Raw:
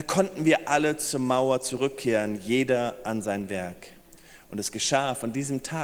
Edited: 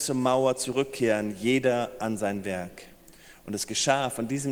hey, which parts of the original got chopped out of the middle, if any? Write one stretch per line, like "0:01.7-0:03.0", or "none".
none

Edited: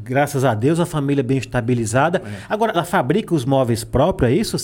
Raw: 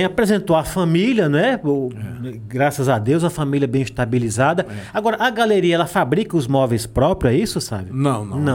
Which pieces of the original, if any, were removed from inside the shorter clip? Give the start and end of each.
0:05.2-0:05.8

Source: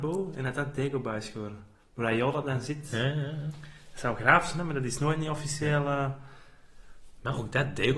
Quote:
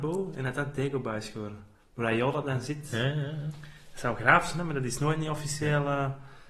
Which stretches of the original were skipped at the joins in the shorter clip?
none

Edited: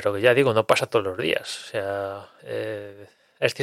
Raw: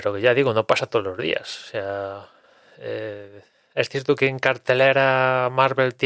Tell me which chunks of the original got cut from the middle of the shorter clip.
0:02.4-0:02.7

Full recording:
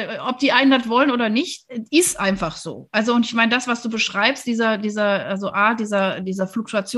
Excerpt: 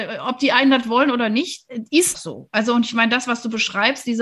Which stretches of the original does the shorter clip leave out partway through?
0:02.1-0:02.5

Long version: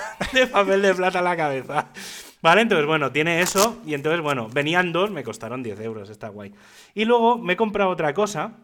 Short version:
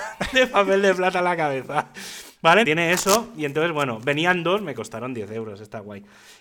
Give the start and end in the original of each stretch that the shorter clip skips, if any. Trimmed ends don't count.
0:02.6-0:03.1

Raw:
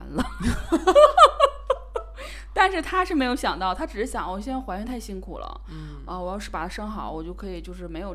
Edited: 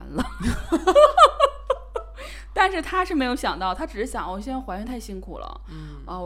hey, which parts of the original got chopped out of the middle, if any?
none

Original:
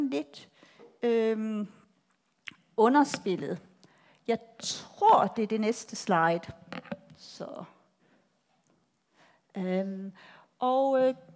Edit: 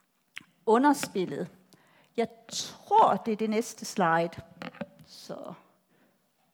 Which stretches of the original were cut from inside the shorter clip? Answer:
none

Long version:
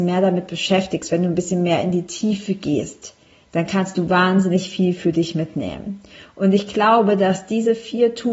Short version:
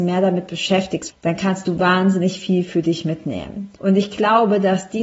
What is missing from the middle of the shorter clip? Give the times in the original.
0:01.1-0:03.4
0:06.1-0:06.3

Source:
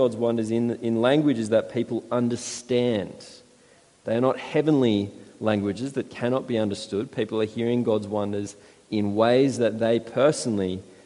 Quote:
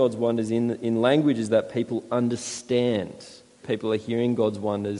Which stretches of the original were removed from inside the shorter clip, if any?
0:03.6-0:07.1

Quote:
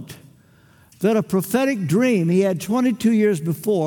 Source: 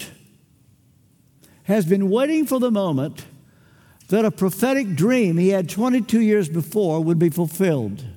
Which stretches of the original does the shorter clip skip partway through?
none

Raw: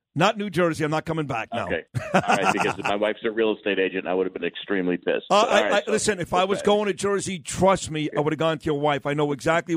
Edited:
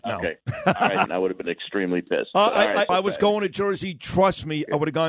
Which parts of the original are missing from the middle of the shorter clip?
0:02.5-0:04.0
0:05.8-0:06.3

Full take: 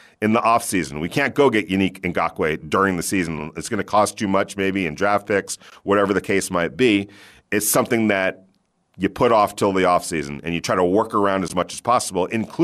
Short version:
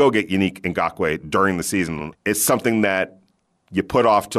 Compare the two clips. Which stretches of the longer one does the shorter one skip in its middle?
0:03.5-0:07.4

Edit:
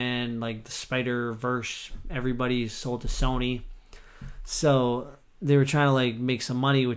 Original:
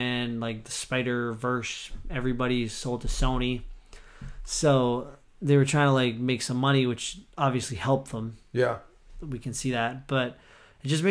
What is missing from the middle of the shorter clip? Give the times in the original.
none

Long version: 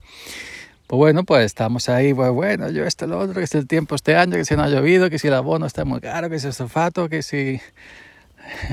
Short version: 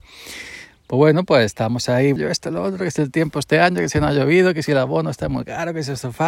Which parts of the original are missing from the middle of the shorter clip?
0:02.2-0:02.7

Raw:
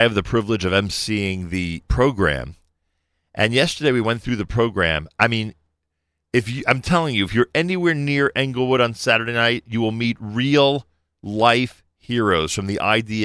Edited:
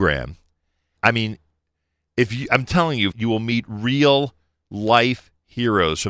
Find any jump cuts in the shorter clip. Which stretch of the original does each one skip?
0:03.1-0:05.1
0:07.3-0:09.6

